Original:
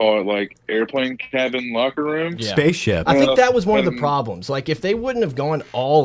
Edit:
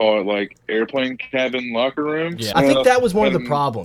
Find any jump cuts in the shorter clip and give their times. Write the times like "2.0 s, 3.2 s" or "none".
2.5 s